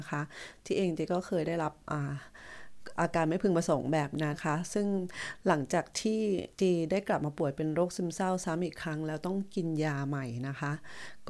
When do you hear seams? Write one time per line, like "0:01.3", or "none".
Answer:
0:04.3